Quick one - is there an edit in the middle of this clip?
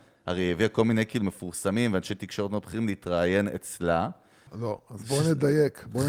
yes; 1 cut; at 4.5 s

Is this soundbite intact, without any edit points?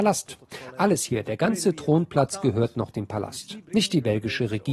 no; 1 cut; at 3.7 s

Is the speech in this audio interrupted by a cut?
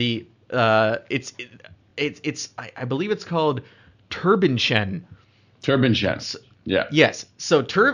no; 0 cuts

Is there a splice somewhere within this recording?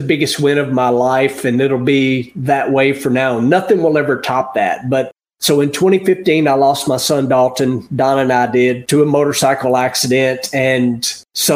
no; 0 cuts

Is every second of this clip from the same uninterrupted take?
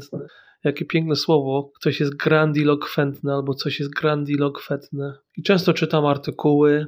no; 1 cut; at 5.3 s

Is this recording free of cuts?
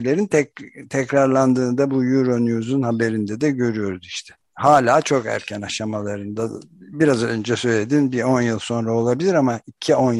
no; 1 cut; at 4.4 s

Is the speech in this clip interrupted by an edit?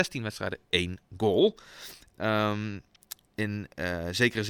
yes; 2 cuts; at 2.1 s, 3.2 s

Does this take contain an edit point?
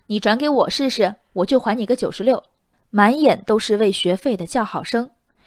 no; 0 cuts

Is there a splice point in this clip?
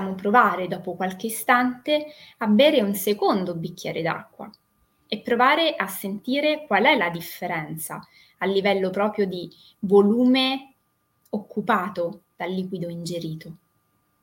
no; 0 cuts

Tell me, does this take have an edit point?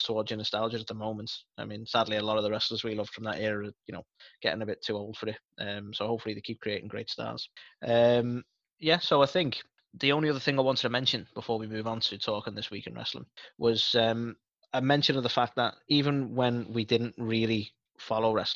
no; 0 cuts

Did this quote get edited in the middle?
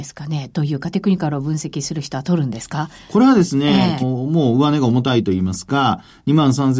yes; 1 cut; at 4.0 s

